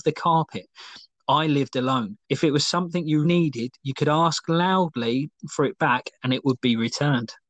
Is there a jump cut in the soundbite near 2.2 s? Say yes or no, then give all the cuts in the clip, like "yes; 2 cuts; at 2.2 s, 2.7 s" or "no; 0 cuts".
yes; 2 cuts; at 2.2 s, 3.2 s